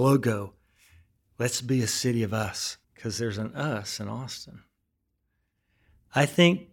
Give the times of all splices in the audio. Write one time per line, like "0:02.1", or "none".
0:02.8